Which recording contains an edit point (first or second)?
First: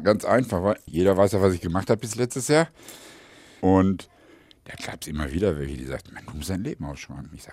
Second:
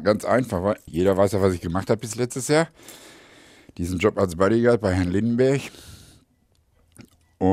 first